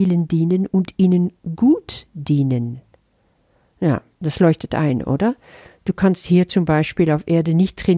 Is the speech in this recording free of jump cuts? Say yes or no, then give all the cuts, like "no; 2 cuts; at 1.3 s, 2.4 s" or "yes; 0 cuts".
yes; 0 cuts